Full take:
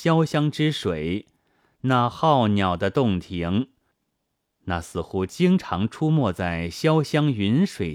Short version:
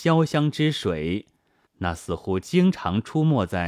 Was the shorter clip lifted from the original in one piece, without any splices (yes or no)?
no